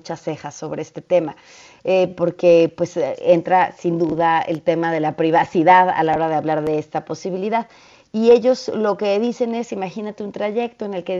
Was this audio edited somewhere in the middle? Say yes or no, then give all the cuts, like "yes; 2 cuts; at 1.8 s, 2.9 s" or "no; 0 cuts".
no; 0 cuts